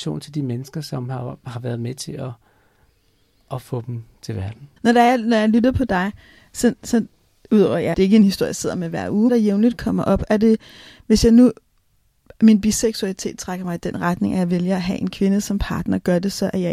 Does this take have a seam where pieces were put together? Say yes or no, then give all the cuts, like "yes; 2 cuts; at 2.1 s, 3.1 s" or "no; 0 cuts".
yes; 3 cuts; at 4.8 s, 7.9 s, 9.3 s